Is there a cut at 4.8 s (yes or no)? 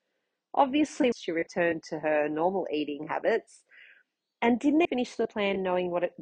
yes